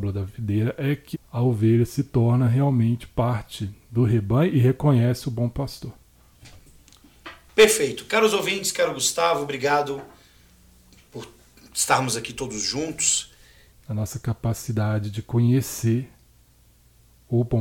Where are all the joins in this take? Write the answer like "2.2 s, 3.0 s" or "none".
1.1 s, 13.7 s